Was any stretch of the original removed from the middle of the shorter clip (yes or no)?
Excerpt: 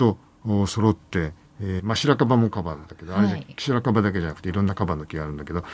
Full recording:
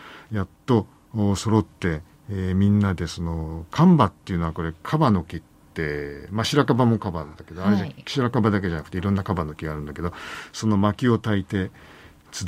yes